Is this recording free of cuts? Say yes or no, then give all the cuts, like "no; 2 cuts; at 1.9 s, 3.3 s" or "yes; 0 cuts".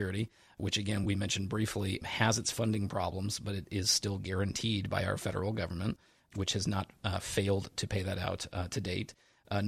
yes; 0 cuts